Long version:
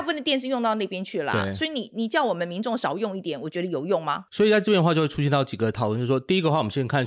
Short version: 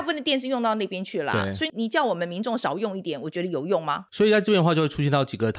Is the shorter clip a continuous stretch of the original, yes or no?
no